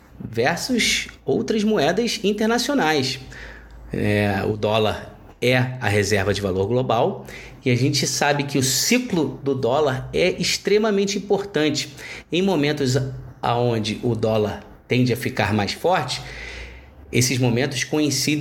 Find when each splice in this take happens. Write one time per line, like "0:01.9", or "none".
none